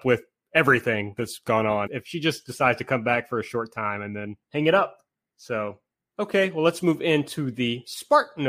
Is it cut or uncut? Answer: cut